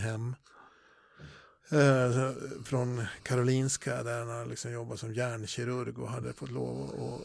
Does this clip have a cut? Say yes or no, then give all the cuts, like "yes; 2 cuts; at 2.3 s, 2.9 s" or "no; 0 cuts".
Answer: no; 0 cuts